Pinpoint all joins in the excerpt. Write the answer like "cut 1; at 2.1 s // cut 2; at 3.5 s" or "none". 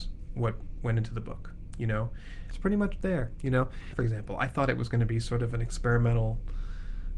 cut 1; at 2.5 s // cut 2; at 3.9 s